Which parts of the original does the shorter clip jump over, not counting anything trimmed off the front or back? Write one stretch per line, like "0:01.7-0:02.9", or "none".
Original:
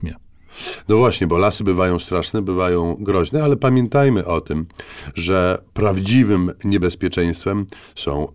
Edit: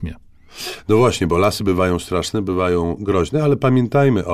none